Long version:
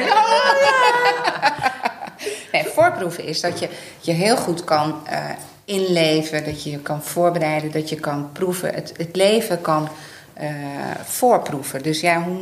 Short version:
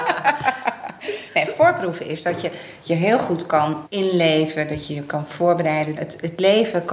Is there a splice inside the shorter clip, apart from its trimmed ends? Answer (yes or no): yes